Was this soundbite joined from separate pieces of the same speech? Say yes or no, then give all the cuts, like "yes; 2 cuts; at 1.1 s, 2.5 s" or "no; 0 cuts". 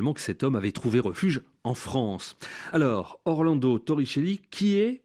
no; 0 cuts